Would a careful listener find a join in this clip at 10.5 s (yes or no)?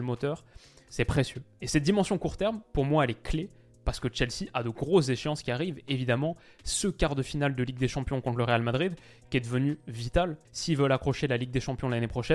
yes